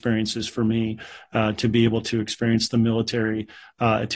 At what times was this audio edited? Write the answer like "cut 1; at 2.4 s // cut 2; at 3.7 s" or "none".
none